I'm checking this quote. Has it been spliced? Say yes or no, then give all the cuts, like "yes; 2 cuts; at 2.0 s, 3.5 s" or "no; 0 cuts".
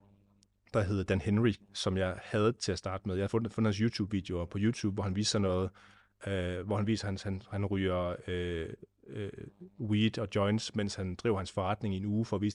no; 0 cuts